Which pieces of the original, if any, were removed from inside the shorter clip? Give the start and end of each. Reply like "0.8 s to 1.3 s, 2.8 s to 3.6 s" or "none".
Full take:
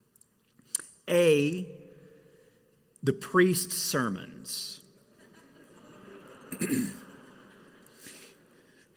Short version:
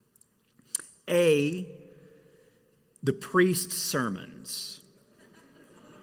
none